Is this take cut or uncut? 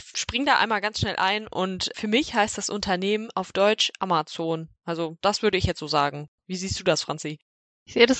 uncut